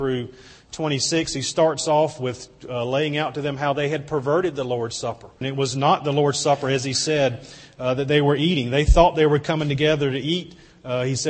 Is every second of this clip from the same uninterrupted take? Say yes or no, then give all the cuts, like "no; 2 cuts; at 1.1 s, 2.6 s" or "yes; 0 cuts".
no; 1 cut; at 5.4 s